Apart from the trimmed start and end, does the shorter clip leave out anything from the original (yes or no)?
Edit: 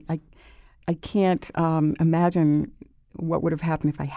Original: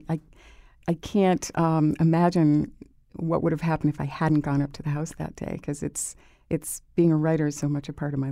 no